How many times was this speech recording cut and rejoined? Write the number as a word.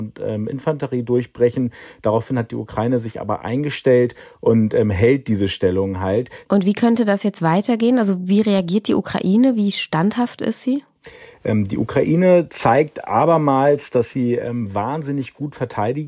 one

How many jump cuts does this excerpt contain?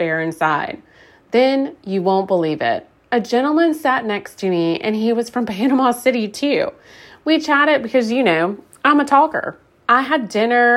zero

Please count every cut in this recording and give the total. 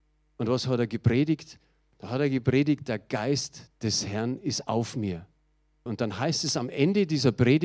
one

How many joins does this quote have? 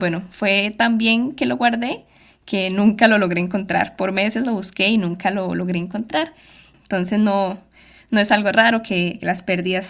one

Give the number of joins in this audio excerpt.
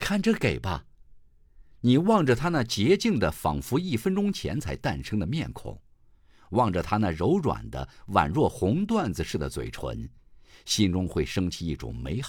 zero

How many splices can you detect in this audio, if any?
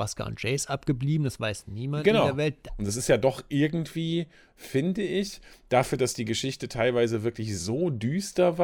one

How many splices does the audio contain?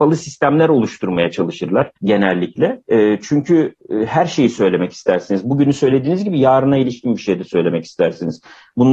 one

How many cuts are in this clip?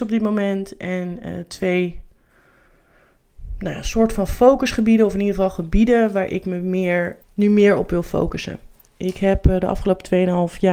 one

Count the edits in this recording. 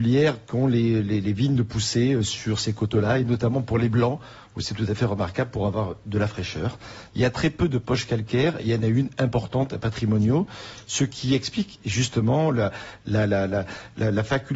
one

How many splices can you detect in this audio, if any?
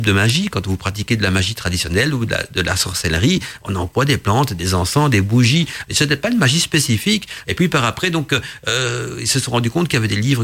two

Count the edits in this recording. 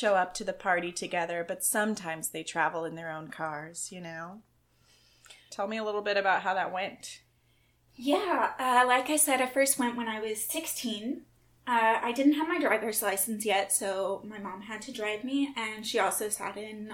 one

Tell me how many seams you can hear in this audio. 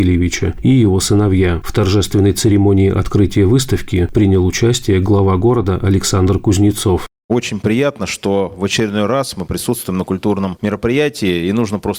zero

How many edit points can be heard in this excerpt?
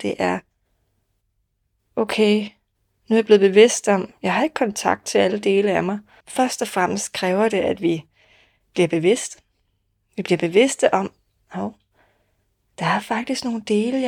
one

